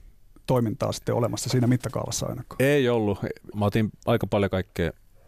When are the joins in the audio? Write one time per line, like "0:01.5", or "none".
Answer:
0:03.5